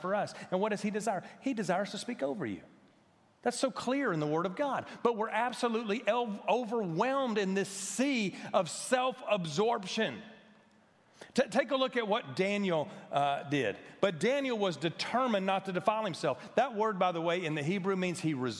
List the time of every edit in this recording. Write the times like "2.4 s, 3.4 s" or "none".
none